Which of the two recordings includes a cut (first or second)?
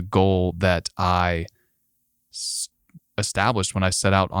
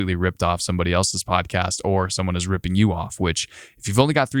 first